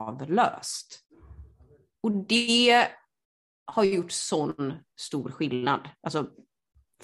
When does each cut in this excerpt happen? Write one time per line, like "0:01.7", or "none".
0:01.9